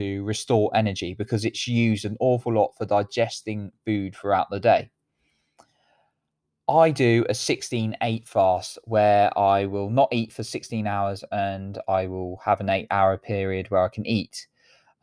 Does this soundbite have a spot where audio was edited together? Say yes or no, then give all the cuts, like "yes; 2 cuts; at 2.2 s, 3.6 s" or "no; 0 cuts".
no; 0 cuts